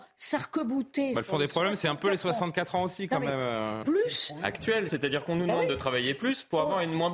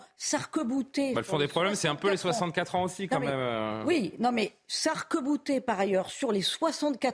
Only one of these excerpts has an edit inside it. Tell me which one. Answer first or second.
first